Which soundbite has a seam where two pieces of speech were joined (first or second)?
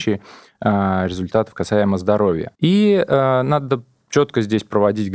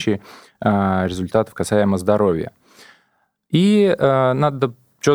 first